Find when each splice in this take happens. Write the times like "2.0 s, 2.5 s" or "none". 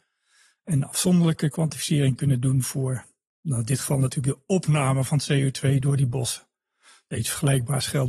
none